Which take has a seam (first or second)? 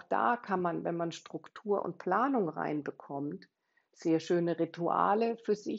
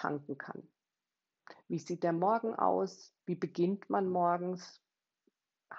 second